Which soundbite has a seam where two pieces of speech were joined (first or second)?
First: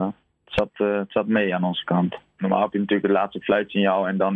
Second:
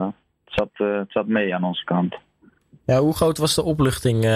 first